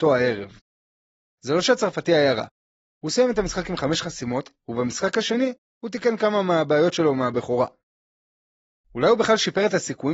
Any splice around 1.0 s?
no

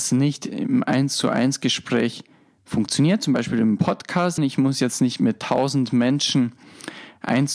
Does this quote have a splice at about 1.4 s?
no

